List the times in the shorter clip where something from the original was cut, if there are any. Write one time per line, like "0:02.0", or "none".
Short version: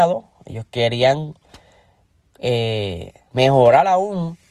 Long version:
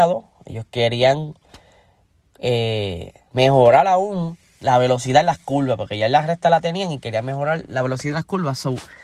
none